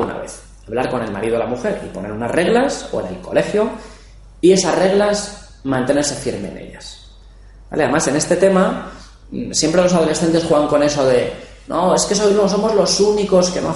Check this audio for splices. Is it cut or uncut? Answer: uncut